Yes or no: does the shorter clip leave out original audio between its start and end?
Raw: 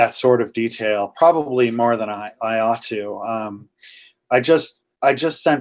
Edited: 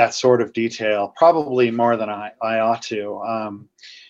no